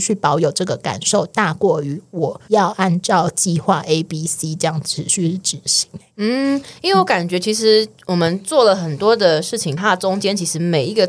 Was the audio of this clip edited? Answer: yes; 1 cut; at 9.8 s

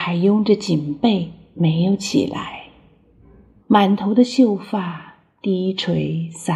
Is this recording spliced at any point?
yes; 1 cut; at 3.6 s

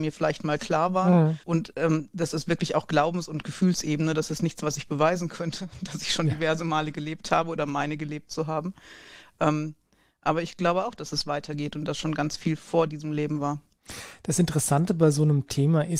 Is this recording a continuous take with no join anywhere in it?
no; 1 cut; at 1.4 s

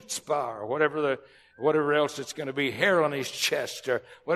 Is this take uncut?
yes; 0 cuts

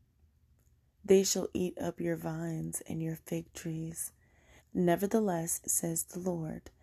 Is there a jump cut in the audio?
yes; 2 cuts; at 4.6 s, 5.6 s

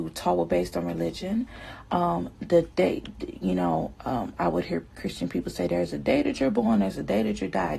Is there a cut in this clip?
no; 0 cuts

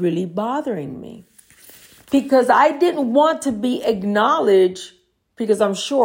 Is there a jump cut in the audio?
no; 0 cuts

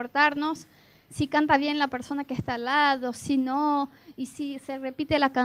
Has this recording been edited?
no; 0 cuts

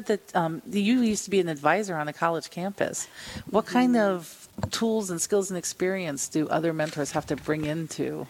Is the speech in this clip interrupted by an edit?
no; 0 cuts

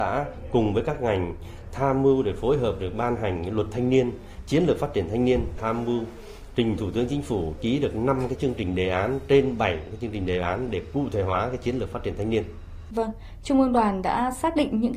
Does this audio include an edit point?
yes; 1 cut; at 13.4 s

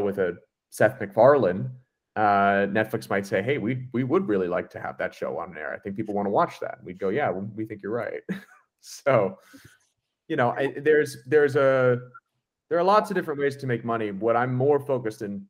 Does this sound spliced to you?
no; 0 cuts

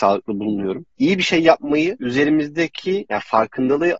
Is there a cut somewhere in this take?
no; 0 cuts

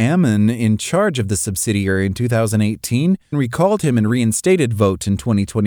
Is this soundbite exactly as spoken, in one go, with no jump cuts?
no; 1 cut; at 3.3 s

